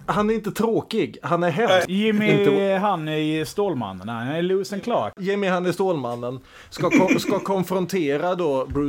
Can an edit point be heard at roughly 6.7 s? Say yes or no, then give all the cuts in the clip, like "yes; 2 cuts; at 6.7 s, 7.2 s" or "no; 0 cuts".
no; 1 cut; at 1.9 s